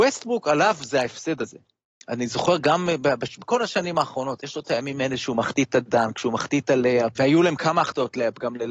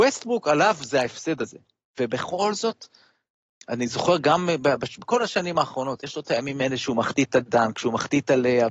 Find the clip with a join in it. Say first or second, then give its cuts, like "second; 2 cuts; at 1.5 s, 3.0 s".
first; 2 cuts; at 1.9 s, 7.2 s